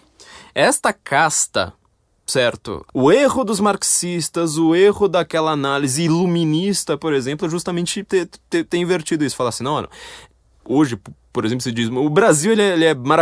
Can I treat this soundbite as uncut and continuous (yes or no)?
no